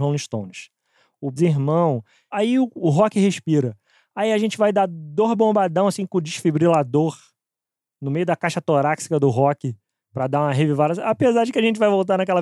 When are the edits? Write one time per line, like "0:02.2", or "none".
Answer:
0:01.4